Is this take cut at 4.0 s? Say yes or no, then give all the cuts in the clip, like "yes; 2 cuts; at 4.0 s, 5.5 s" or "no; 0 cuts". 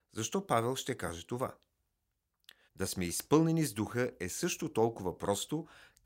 no; 1 cut; at 2.7 s